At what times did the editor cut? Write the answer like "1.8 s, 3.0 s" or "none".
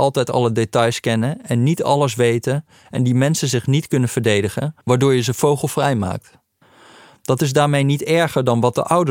none